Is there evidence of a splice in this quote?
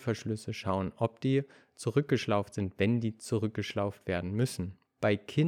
no; 0 cuts

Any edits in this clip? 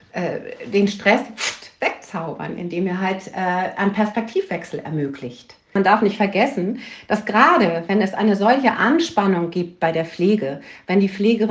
no; 0 cuts

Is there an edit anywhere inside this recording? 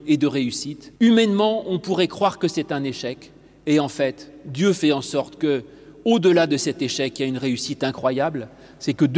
yes; 1 cut; at 1.0 s

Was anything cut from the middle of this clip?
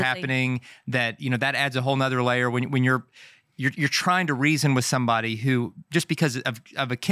no; 0 cuts

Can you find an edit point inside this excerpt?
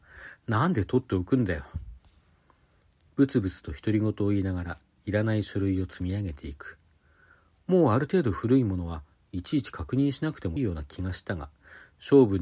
yes; 1 cut; at 10.6 s

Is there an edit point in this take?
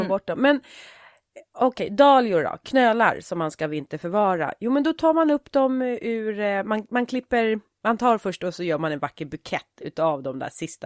no; 0 cuts

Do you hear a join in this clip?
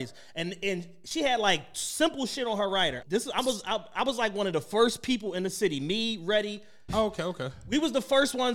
yes; 2 cuts; at 3.0 s, 6.9 s

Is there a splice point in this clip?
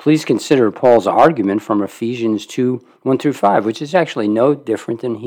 no; 0 cuts

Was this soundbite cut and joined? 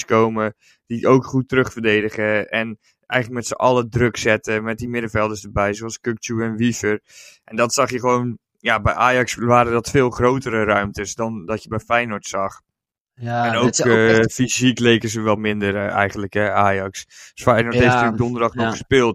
no; 0 cuts

